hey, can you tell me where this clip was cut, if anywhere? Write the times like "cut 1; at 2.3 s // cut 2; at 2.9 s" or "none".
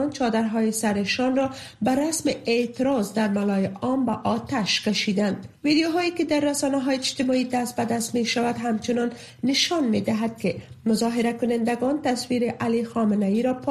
cut 1; at 5.6 s